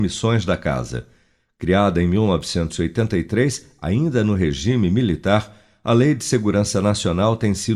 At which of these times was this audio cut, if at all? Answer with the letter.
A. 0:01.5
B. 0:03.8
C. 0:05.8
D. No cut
D